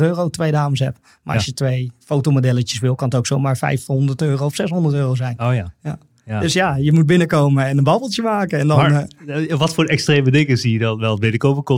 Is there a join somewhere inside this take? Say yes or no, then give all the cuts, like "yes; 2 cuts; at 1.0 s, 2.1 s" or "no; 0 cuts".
no; 0 cuts